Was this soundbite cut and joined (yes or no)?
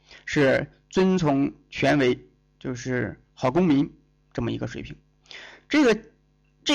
no